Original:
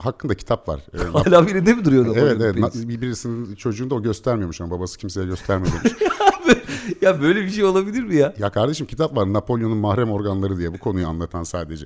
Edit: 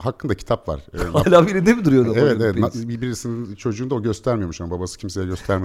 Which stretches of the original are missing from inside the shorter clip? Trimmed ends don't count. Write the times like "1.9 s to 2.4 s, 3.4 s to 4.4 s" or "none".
none